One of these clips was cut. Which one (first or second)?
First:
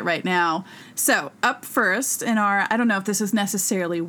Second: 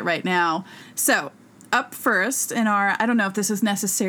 first